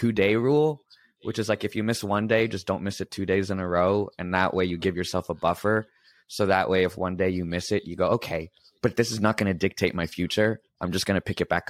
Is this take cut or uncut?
uncut